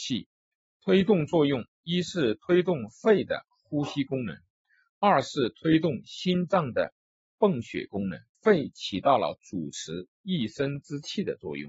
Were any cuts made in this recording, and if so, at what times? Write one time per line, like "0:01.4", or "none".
0:08.3